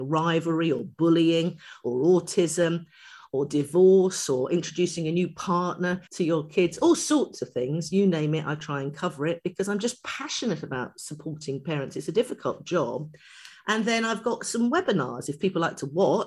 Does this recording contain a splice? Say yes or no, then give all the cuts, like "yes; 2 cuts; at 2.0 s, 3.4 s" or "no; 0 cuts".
yes; 1 cut; at 6.1 s